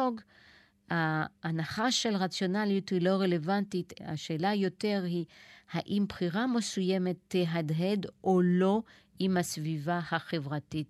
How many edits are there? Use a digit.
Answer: 1